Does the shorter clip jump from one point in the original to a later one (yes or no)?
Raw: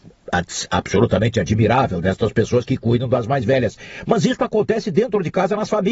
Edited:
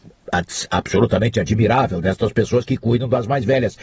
no